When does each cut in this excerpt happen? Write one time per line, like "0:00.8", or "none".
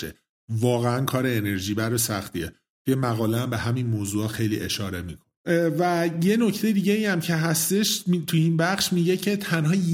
0:05.4